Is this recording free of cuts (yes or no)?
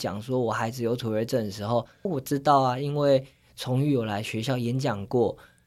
no